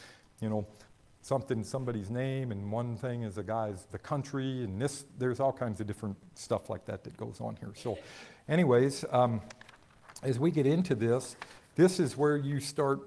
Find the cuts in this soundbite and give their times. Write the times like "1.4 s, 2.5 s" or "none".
none